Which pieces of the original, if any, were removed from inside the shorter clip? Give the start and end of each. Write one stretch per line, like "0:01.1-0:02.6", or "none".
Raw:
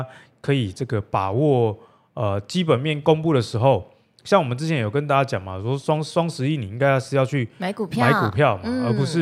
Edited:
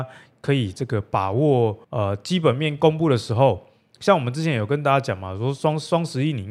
0:01.8-0:02.1